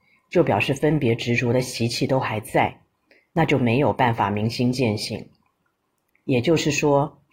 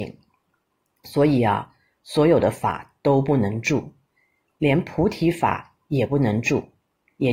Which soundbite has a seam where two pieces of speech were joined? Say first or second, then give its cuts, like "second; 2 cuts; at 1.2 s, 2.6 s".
first; 1 cut; at 6.1 s